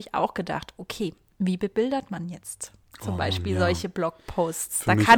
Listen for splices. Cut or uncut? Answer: uncut